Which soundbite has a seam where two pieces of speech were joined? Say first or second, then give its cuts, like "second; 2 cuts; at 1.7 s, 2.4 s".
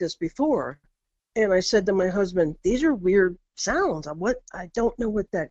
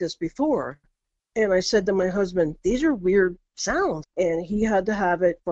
second; 1 cut; at 4.0 s